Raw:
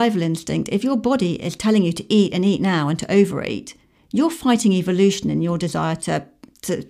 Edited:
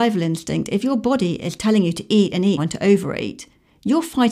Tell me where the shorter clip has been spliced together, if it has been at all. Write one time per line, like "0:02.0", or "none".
0:02.6